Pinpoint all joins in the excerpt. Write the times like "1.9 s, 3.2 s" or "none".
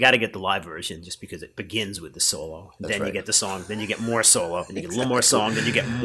none

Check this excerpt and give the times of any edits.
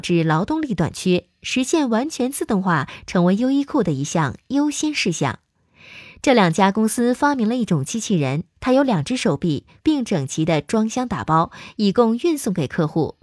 9.8 s

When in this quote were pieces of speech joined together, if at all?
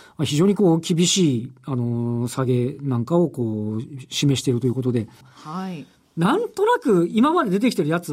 5.2 s

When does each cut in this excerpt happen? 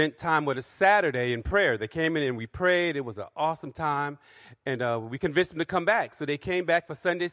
none

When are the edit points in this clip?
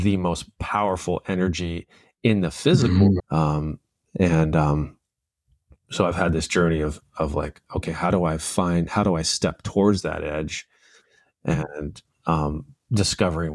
3.2 s

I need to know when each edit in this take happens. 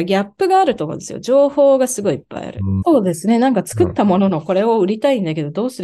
2.8 s

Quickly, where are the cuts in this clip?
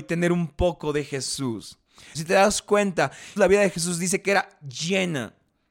2.1 s, 3.4 s

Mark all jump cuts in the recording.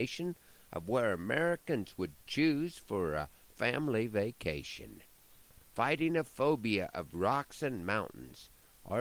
5.6 s

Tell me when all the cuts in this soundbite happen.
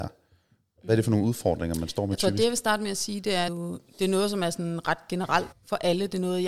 3.5 s, 5.5 s

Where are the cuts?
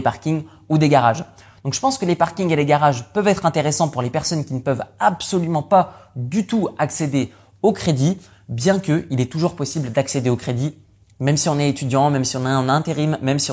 none

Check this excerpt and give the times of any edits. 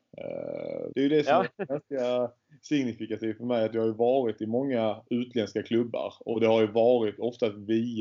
0.9 s

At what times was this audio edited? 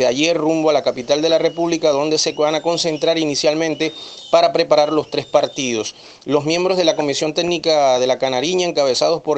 none

